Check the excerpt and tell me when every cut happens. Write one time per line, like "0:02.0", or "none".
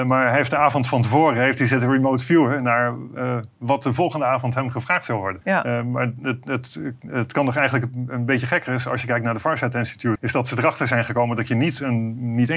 0:05.4
0:10.2